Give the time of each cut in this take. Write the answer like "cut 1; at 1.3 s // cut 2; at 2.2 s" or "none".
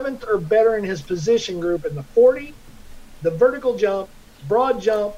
none